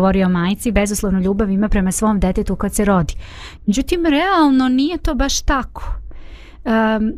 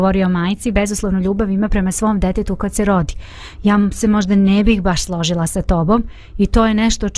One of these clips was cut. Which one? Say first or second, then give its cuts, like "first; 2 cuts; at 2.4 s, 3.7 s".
first; 1 cut; at 3.6 s